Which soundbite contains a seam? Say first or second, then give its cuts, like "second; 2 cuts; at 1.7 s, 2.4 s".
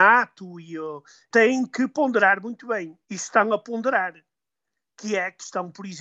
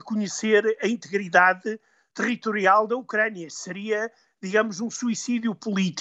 first; 1 cut; at 3.0 s